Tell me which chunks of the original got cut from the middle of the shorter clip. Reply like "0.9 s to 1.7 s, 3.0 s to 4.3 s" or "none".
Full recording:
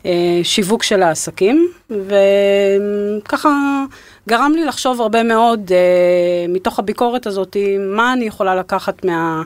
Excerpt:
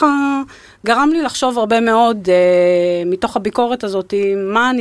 none